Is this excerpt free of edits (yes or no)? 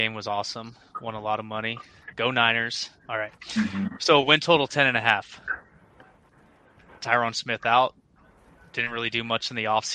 yes